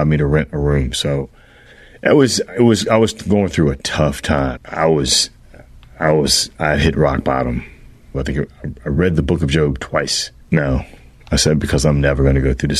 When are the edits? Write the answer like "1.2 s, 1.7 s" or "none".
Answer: 4.6 s, 8.1 s, 10.4 s